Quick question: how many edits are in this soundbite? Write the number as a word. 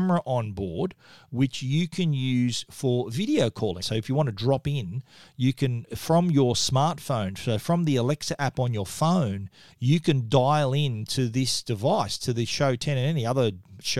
one